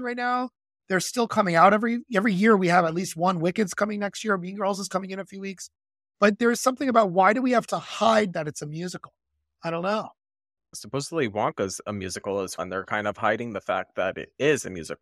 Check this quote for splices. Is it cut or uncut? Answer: cut